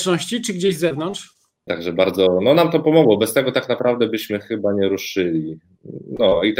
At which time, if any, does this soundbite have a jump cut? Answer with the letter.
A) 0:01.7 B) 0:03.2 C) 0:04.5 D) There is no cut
A